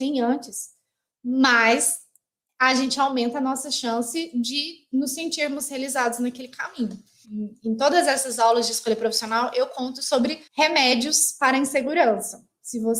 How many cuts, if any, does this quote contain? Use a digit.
2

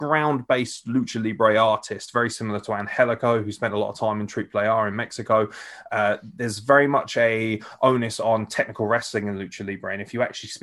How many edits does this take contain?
0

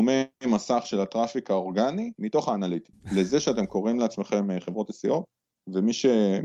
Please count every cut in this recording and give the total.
1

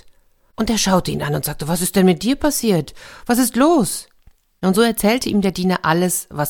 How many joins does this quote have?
0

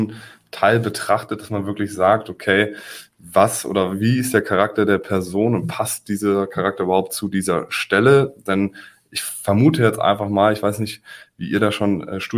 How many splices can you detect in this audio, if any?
0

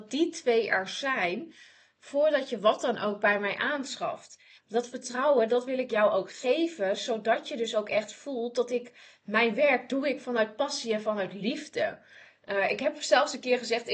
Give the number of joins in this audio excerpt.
1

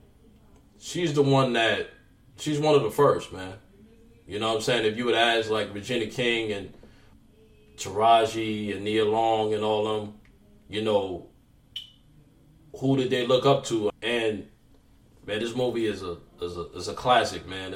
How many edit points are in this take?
1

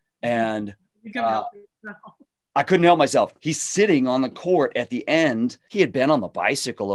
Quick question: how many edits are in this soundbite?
2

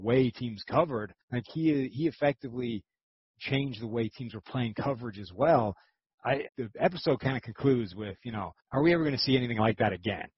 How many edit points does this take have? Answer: 3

